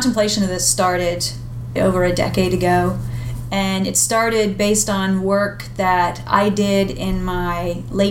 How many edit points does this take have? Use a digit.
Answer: 1